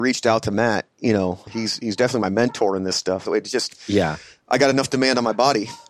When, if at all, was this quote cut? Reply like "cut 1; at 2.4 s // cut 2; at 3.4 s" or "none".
cut 1; at 1.5 s // cut 2; at 3.3 s